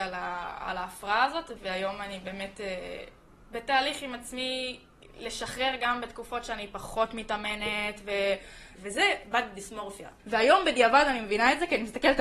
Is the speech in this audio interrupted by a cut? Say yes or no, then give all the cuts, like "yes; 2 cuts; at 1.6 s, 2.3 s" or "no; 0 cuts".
yes; 3 cuts; at 1.6 s, 8.7 s, 10.2 s